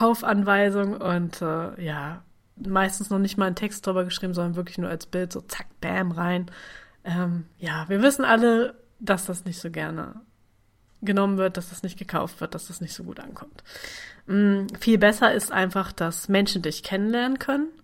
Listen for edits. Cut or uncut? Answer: uncut